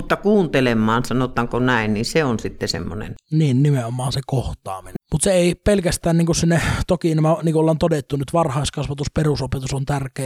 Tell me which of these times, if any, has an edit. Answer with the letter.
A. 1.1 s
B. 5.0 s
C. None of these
B